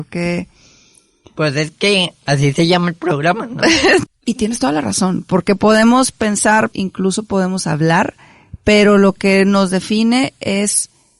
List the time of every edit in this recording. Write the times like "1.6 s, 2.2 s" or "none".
4.1 s, 6.7 s